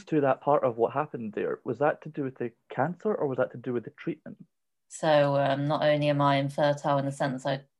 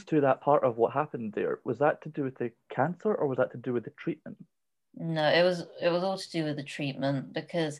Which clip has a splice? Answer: first; 1 cut; at 4.9 s

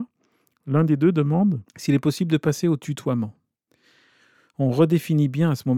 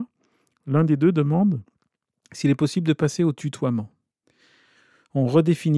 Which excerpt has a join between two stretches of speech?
first; 1 cut; at 1.7 s

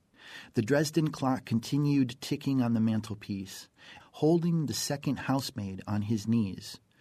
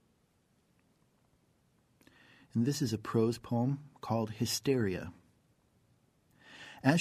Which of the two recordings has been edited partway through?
first; 1 cut; at 4.0 s

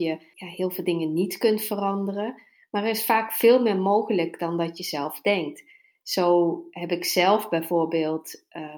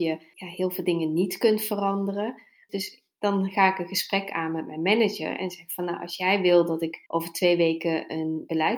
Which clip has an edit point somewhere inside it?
second; 2 cuts; at 2.7 s, 7.1 s

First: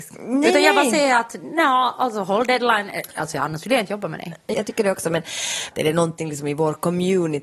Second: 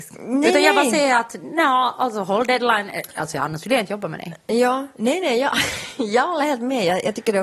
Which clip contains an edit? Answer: first; 2 cuts; at 4.5 s, 5.7 s

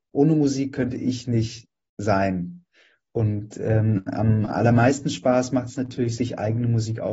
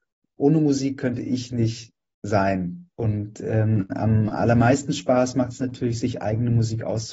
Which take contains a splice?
second; 1 cut; at 2.9 s

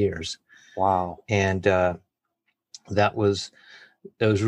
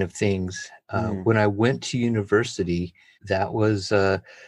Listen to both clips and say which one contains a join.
second; 1 cut; at 3.1 s

